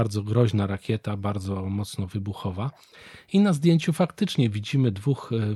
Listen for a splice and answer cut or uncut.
uncut